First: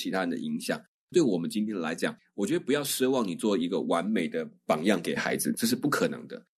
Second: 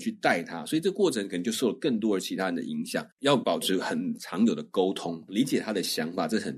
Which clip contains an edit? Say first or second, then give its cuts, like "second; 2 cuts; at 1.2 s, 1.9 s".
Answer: second; 2 cuts; at 3.1 s, 5.3 s